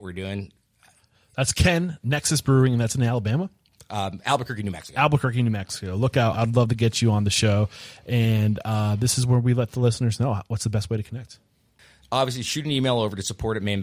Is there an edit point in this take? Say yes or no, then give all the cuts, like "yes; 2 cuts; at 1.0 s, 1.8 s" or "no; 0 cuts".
yes; 1 cut; at 6.3 s